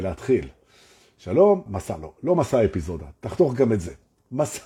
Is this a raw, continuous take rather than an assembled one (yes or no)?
no